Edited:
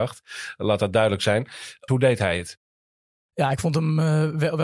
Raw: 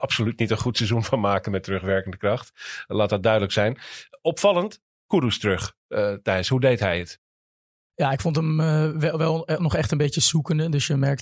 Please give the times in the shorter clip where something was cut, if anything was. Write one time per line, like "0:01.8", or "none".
0:01.9